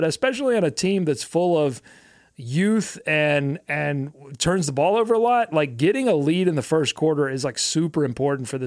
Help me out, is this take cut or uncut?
uncut